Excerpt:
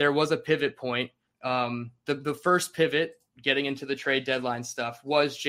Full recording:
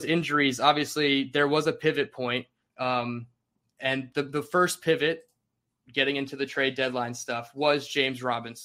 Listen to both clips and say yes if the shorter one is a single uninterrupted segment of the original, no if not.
no